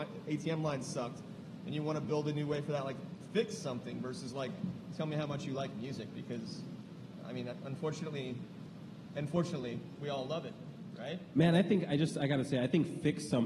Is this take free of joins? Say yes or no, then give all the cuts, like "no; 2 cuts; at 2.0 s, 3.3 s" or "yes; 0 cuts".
yes; 0 cuts